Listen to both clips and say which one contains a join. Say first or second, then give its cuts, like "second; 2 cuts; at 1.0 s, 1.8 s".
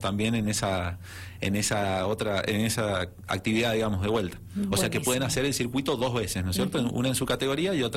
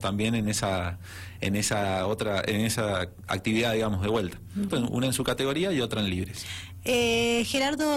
second; 1 cut; at 4.7 s